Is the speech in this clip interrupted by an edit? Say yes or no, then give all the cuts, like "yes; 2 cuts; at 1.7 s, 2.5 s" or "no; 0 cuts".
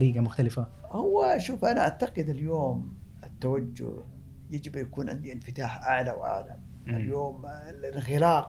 no; 0 cuts